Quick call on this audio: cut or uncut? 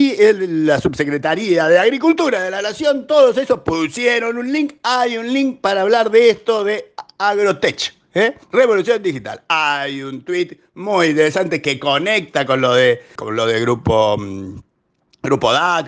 cut